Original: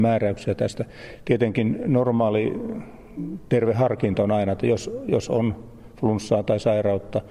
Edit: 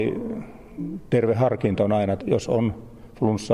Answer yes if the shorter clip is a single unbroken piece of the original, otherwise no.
no